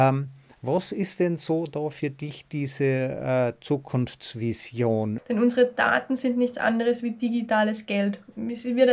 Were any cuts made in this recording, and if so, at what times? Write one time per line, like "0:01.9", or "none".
0:05.2

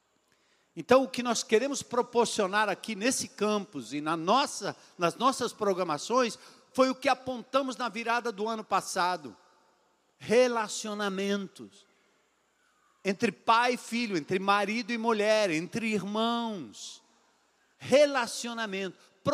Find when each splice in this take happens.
none

